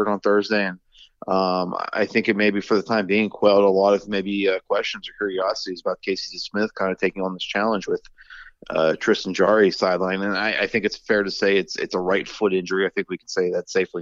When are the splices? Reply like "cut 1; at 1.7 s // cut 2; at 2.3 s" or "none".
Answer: none